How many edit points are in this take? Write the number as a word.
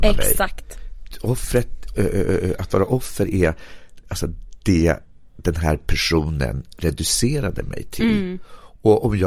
one